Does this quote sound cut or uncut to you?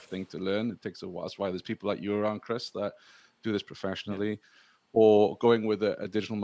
uncut